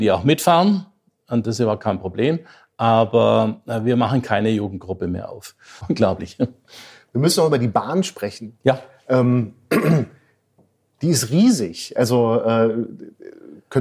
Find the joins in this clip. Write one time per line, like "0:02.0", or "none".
0:05.8